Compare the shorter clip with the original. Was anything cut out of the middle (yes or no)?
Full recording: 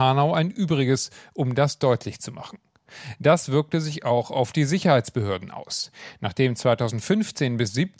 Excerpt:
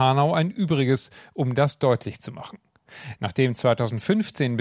yes